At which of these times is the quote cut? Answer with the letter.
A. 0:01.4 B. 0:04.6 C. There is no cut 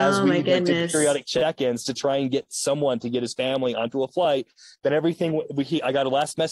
C